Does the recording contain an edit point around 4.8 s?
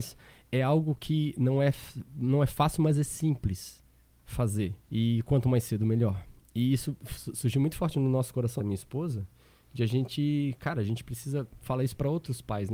yes; 2 cuts; at 4.8 s, 8.6 s

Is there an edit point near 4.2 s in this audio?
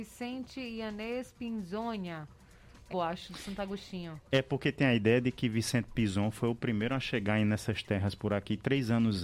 no; 1 cut; at 2.9 s

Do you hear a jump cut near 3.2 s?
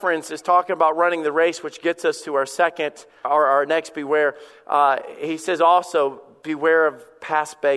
yes; 1 cut; at 3.2 s

